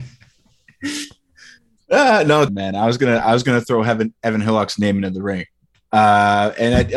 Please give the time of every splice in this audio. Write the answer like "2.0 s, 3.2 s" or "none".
2.5 s